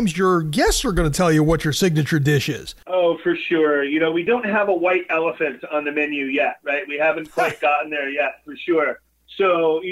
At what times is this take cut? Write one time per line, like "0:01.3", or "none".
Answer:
none

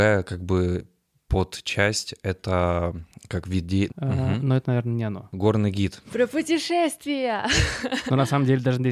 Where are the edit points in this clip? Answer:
0:03.9
0:06.0

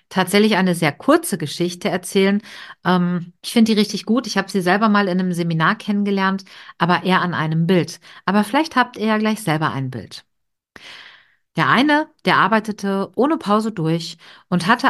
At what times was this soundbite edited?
0:03.4
0:11.5

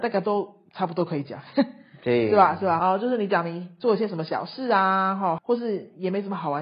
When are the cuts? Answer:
0:02.8
0:05.4

